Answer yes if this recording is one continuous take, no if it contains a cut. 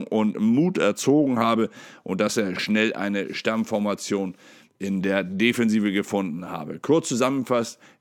yes